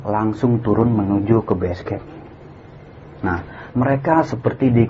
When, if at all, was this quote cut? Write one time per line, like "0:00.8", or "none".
0:03.7

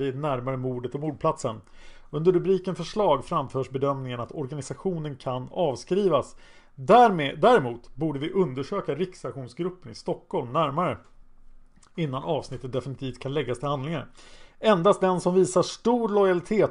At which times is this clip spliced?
none

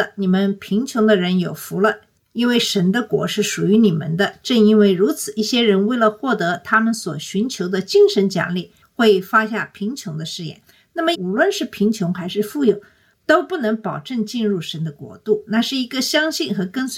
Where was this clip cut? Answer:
0:11.1

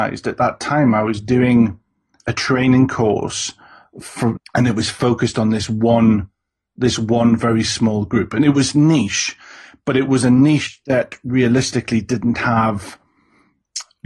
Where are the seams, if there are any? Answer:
0:04.4

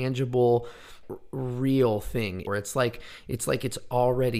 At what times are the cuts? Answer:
0:01.0
0:02.5

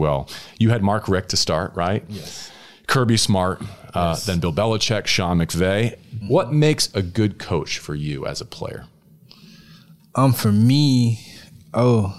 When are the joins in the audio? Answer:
0:06.2

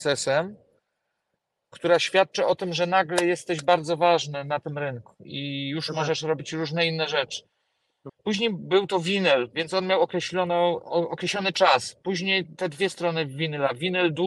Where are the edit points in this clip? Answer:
0:08.1

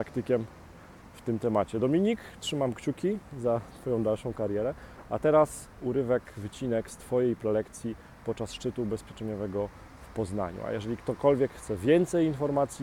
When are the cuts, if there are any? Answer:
0:05.8

